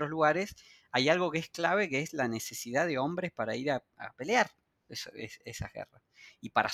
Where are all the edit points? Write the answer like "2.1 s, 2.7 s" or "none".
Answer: none

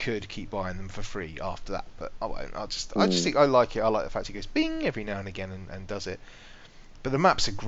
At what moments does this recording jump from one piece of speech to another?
none

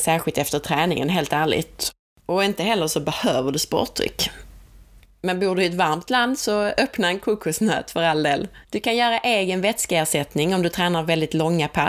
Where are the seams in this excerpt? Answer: 8.6 s

